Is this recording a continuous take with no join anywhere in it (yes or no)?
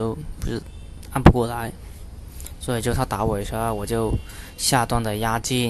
yes